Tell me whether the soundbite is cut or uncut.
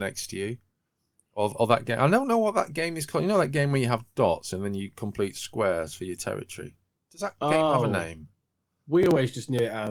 uncut